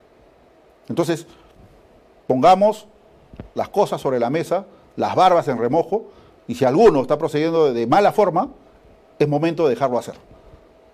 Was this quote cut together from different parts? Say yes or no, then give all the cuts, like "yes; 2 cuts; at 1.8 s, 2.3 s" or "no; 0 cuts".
no; 0 cuts